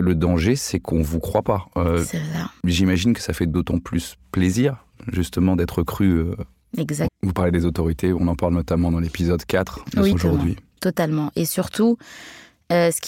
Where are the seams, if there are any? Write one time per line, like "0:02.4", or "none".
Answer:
0:07.1
0:10.1